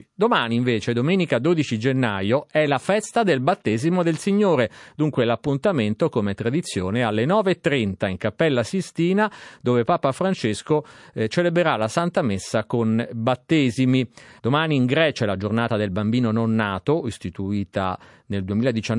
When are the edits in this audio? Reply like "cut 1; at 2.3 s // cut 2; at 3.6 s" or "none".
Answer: cut 1; at 14.4 s